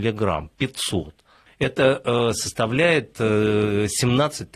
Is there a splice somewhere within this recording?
yes; 1 cut; at 1.5 s

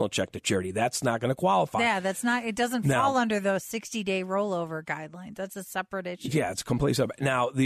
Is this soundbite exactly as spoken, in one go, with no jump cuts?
yes; 0 cuts

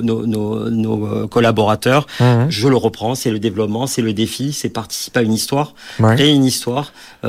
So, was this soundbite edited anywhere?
no; 0 cuts

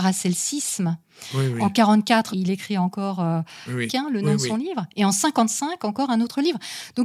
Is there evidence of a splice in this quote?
yes; 2 cuts; at 2.3 s, 3.9 s

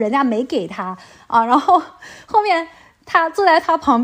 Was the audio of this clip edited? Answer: no; 0 cuts

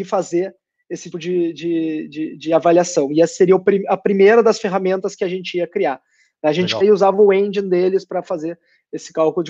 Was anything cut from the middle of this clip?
yes; 2 cuts; at 1.1 s, 6.8 s

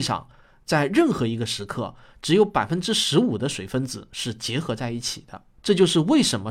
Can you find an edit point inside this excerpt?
yes; 1 cut; at 5.6 s

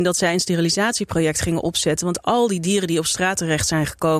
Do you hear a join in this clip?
no; 0 cuts

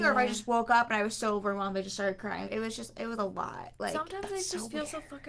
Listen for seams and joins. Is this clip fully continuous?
no; 1 cut; at 2.5 s

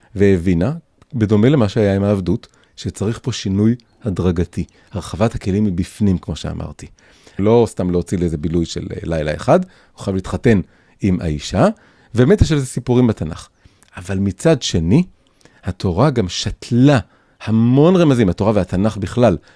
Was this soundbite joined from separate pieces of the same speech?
yes; 1 cut; at 7.4 s

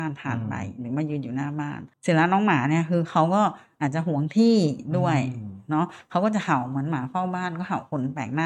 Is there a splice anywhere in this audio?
yes; 1 cut; at 1.9 s

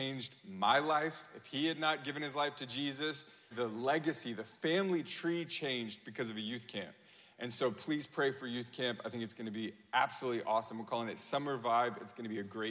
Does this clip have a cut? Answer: yes; 1 cut; at 3.5 s

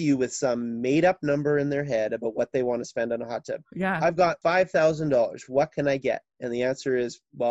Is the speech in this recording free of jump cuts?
yes; 0 cuts

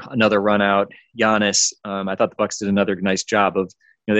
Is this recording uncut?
yes; 0 cuts

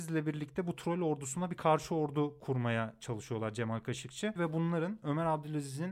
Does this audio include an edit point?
yes; 1 cut; at 4.4 s

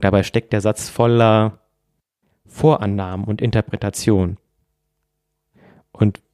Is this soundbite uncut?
yes; 0 cuts

